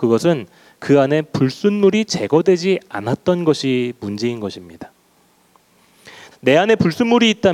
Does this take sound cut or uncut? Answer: cut